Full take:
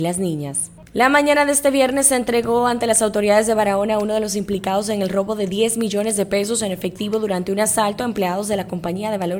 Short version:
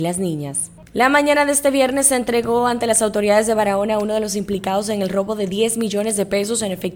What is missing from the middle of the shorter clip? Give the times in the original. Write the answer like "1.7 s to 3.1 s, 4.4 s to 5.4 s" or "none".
none